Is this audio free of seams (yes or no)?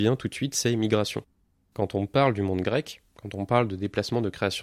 yes